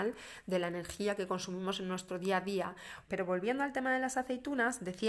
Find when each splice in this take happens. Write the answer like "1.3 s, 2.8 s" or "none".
3.0 s